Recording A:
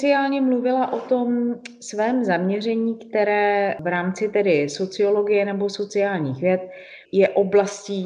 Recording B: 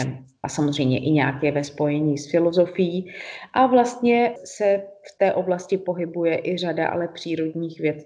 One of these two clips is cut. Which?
A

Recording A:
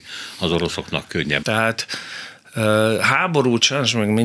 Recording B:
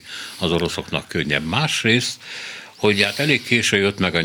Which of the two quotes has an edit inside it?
A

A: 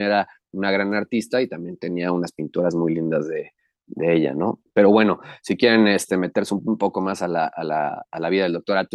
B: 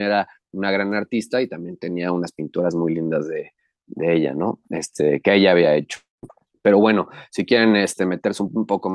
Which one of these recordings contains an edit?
A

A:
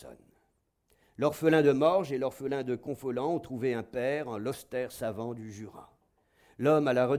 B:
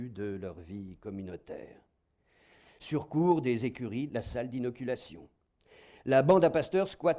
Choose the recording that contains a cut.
B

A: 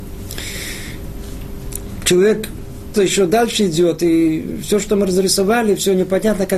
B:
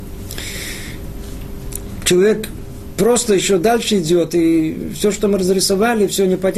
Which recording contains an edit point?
A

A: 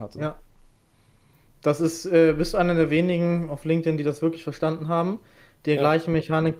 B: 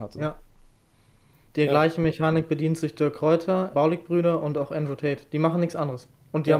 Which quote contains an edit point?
B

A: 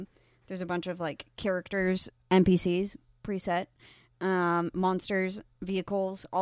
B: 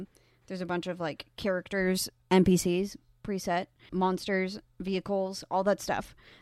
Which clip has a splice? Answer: B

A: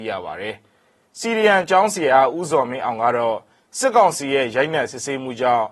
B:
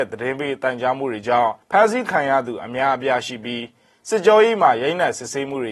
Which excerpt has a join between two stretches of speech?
B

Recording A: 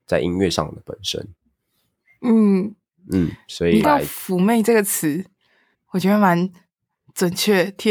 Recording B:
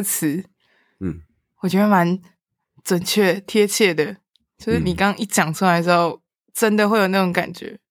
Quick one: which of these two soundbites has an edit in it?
A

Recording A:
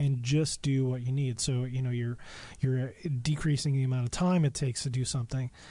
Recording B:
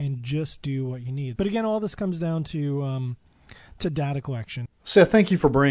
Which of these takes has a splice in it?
B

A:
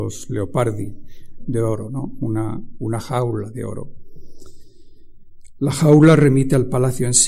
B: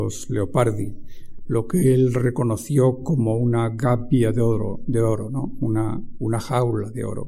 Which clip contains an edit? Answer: A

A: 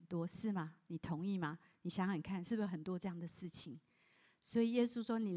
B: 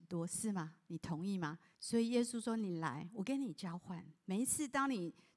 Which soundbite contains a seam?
B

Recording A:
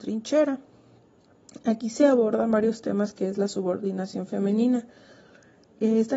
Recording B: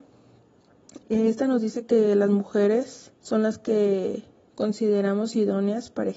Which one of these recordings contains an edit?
B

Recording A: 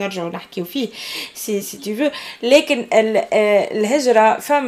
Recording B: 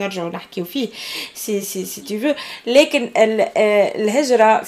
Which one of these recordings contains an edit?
A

